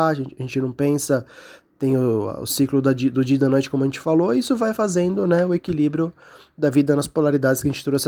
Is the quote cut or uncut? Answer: uncut